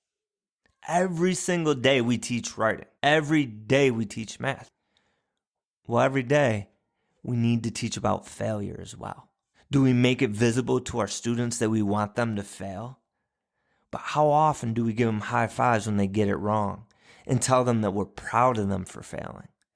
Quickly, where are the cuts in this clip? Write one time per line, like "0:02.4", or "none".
0:03.0
0:09.5
0:13.8